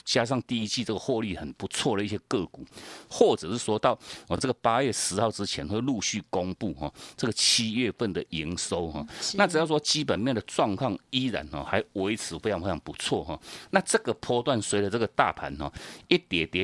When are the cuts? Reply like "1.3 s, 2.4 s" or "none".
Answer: none